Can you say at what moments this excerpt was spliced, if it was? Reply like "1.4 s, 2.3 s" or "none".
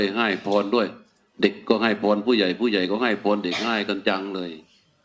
none